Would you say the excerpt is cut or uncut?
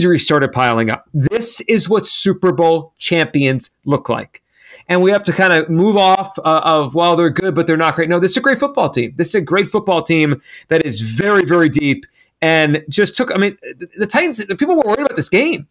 uncut